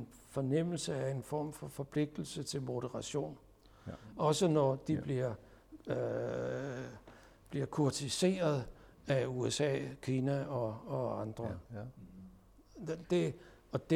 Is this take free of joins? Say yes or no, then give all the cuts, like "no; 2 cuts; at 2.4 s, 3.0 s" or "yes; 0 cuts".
no; 2 cuts; at 11.6 s, 13.0 s